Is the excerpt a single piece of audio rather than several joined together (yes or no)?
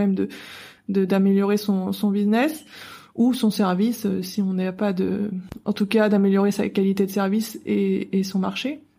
yes